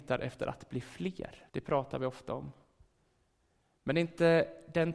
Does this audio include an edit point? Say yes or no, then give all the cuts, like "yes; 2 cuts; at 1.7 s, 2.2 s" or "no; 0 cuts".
yes; 1 cut; at 1.5 s